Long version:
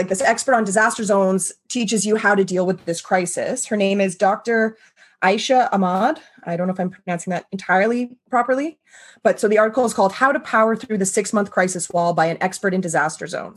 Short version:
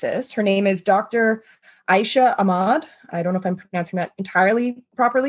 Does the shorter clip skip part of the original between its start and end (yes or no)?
no